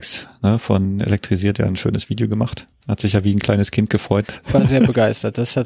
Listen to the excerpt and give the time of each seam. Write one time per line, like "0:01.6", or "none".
0:04.4